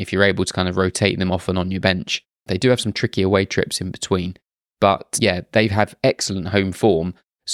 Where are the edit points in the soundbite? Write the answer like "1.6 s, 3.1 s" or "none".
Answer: 2.5 s